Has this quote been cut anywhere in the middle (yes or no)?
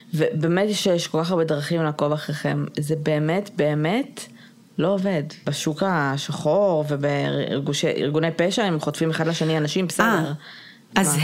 yes